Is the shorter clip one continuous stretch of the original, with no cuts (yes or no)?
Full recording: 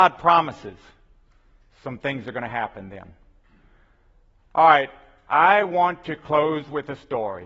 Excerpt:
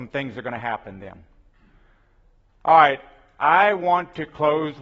yes